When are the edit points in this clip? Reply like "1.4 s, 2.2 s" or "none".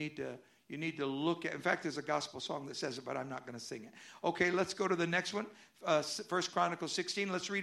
none